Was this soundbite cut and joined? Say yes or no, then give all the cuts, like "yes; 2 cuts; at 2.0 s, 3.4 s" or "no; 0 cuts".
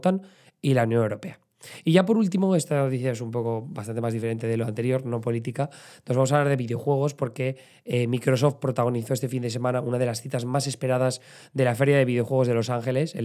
no; 0 cuts